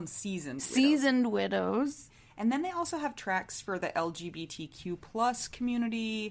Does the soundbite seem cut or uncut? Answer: uncut